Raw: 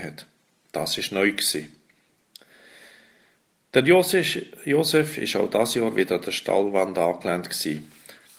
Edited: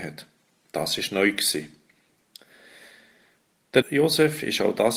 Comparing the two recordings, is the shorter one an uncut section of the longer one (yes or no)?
no